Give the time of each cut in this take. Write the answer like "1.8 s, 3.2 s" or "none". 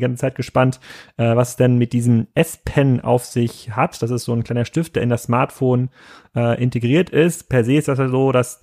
none